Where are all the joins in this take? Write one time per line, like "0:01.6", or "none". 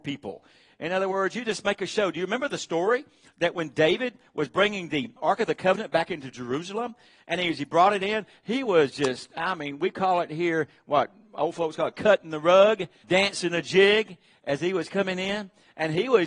0:05.2
0:13.0